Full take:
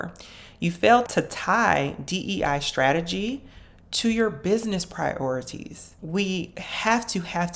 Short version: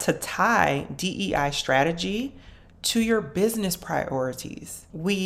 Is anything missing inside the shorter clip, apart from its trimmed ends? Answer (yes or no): no